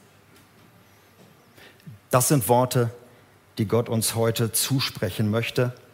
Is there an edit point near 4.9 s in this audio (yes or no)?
no